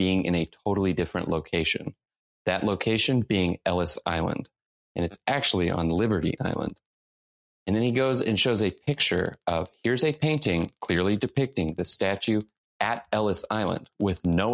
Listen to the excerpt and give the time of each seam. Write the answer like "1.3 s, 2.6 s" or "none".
none